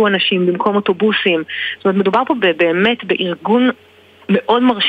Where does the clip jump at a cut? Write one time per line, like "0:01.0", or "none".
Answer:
none